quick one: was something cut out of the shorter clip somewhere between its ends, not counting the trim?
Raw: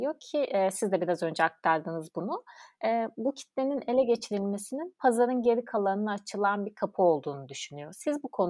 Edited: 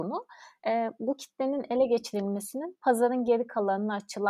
no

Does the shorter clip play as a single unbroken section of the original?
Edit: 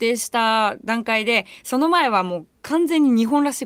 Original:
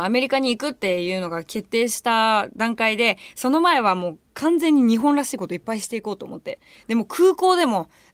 yes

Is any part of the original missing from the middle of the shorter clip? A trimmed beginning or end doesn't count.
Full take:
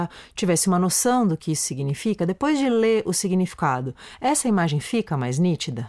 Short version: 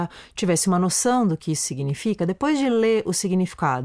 no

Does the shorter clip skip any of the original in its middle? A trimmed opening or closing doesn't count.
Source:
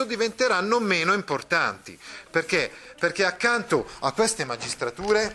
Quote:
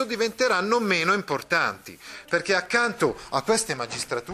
yes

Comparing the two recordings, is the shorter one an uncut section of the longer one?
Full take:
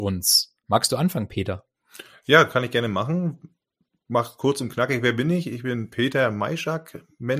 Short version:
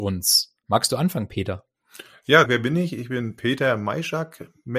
no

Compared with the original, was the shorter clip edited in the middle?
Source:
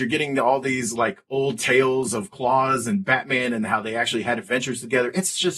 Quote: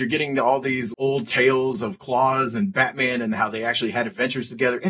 yes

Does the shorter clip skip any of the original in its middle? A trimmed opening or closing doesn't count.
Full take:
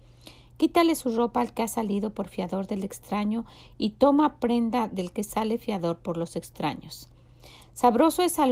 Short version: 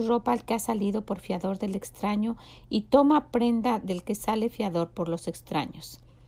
no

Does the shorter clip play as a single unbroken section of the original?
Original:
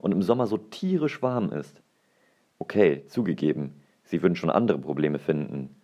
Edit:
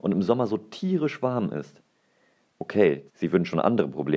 no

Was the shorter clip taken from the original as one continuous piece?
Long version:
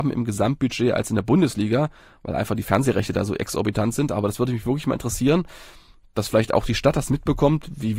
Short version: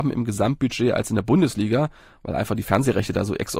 yes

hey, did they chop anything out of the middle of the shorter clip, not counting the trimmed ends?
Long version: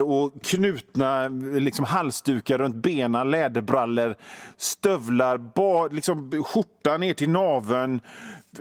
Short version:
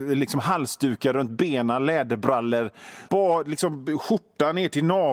yes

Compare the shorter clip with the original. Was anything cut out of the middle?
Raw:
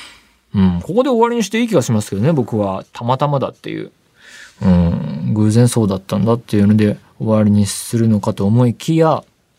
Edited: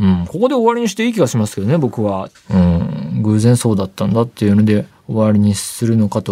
yes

